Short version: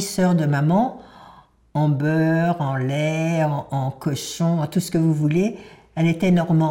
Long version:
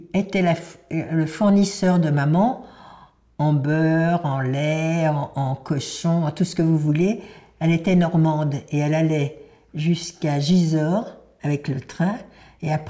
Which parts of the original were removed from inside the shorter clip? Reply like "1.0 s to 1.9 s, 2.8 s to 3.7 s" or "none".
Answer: none